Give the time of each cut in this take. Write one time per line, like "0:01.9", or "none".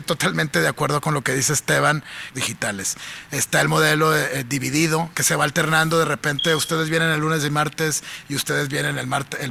0:02.3
0:05.1